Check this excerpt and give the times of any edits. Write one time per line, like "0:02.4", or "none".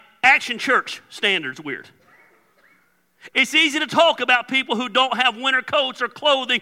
0:03.3